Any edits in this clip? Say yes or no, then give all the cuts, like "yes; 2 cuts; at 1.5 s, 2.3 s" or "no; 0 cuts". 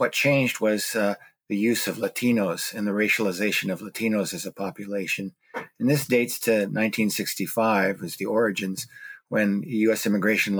no; 0 cuts